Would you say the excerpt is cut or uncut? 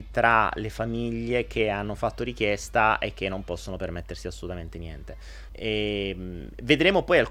cut